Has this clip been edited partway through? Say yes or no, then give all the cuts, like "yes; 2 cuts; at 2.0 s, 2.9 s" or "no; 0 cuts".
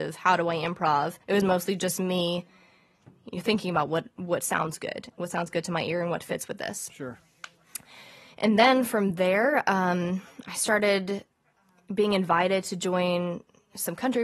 yes; 1 cut; at 1.2 s